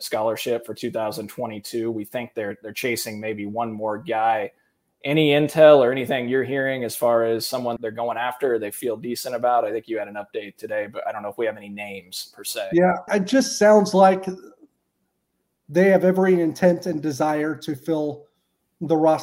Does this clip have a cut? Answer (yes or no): yes